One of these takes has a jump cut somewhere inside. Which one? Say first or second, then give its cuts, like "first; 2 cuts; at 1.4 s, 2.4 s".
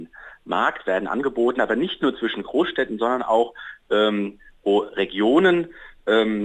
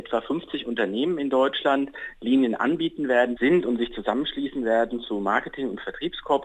second; 1 cut; at 3.4 s